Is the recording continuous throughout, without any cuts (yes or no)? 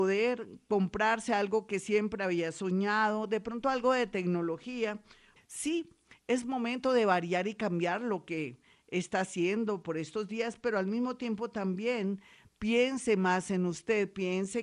no